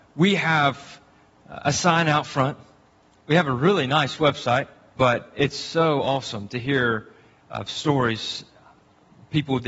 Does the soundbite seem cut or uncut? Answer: cut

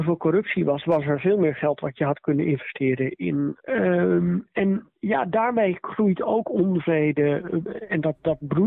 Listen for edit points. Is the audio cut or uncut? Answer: cut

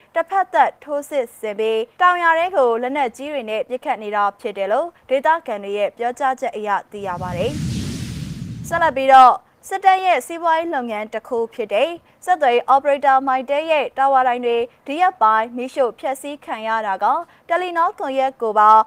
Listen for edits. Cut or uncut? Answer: uncut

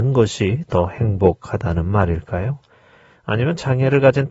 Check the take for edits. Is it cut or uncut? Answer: uncut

